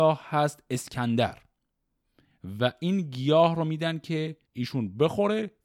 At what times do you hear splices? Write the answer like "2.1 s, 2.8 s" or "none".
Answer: 4.5 s